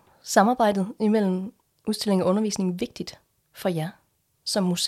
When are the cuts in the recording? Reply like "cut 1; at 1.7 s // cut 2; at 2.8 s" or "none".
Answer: none